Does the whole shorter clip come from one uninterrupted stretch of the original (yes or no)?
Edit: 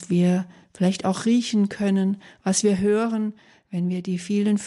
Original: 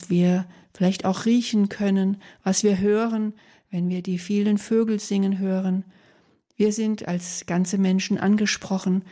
yes